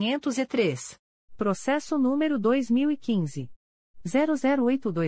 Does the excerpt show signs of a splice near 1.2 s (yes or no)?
yes